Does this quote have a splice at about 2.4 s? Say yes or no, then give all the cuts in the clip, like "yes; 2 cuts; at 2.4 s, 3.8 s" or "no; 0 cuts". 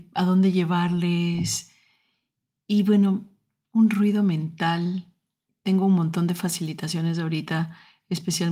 no; 0 cuts